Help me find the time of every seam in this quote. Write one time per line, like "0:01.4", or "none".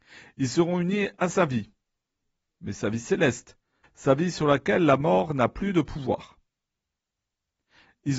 0:02.5
0:03.8

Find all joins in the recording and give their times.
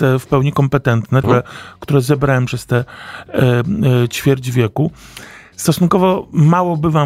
0:01.2

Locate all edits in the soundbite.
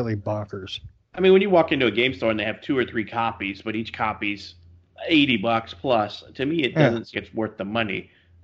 0:07.1

